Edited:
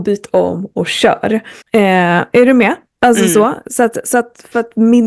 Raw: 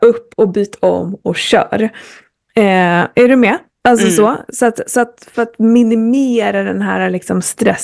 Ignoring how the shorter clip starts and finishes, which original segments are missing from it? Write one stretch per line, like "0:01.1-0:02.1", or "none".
0:02.1-0:02.4